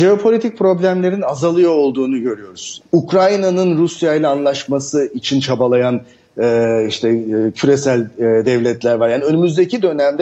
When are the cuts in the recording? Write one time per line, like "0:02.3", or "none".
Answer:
0:02.8